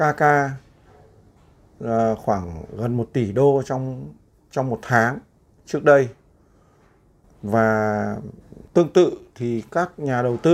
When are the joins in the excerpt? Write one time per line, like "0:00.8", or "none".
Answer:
0:07.2